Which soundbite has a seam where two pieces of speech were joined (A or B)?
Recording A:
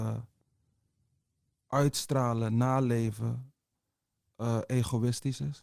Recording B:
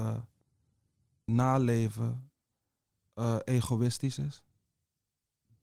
B